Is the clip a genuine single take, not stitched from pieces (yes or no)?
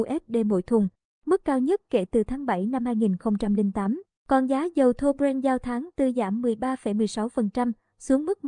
no